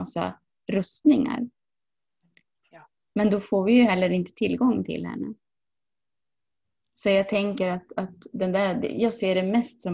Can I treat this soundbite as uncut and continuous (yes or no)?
yes